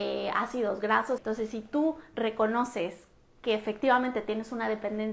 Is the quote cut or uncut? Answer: cut